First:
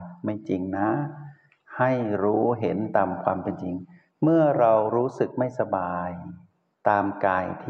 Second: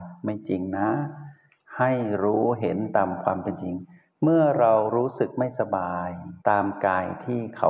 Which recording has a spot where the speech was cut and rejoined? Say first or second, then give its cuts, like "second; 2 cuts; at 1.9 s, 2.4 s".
second; 1 cut; at 6.4 s